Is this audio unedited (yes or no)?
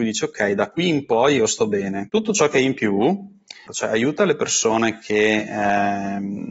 no